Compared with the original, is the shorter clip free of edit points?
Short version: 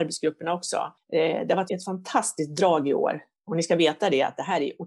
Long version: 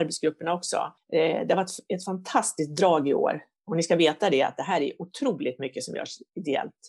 no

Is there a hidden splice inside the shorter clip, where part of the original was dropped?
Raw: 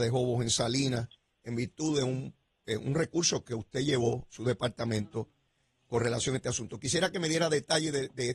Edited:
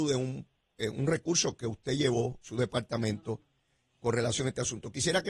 no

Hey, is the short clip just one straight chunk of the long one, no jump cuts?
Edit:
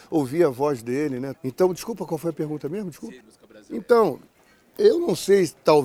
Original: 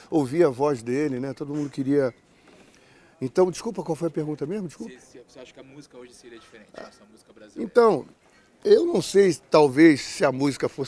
no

